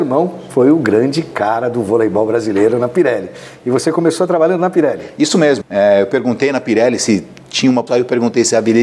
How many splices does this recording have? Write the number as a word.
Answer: two